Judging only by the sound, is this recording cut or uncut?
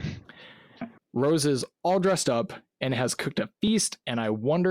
cut